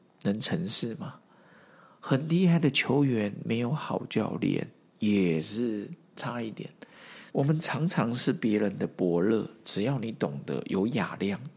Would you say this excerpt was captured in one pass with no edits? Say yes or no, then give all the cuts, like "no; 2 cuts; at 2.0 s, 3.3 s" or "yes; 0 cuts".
no; 1 cut; at 7.3 s